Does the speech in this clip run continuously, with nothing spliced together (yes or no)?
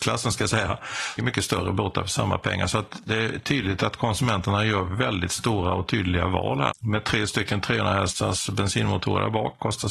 no